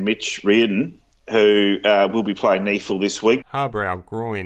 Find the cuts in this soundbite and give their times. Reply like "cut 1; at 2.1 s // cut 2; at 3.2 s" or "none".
cut 1; at 3.4 s